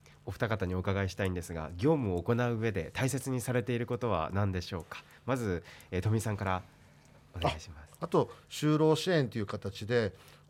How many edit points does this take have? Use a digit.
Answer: 1